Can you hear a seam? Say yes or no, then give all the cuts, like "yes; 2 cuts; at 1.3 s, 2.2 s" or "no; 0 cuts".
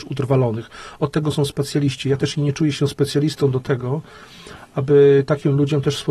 no; 0 cuts